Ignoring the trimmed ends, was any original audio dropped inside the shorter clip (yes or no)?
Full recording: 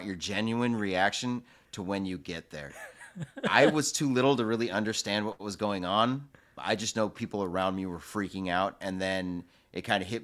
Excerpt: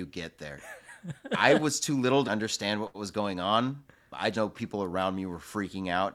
yes